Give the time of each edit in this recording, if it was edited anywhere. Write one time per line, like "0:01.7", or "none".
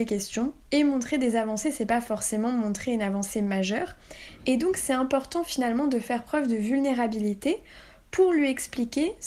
0:04.4

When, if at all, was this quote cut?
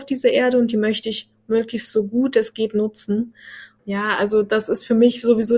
0:03.8

